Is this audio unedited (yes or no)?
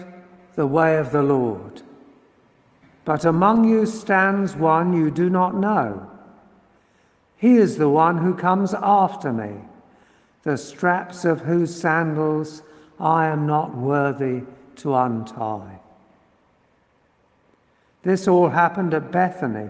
no